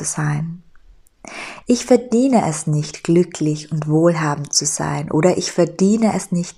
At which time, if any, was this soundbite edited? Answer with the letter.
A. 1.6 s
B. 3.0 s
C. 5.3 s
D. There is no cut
A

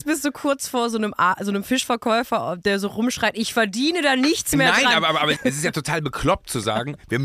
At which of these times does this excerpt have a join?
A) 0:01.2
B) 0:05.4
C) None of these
B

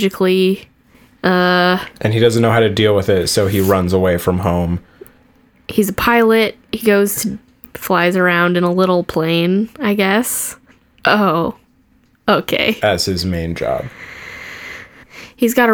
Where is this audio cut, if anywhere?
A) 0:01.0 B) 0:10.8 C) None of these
B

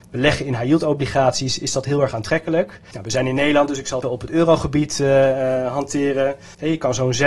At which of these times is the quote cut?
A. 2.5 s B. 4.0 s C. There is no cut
B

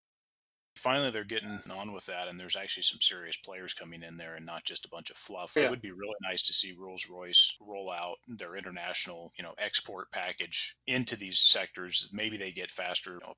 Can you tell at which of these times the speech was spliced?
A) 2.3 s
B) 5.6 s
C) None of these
B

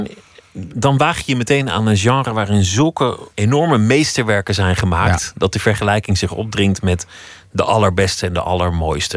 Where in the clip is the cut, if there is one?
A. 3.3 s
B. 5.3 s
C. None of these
A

